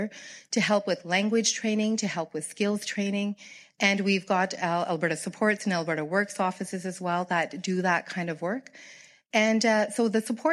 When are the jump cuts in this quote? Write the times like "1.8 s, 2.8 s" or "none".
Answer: none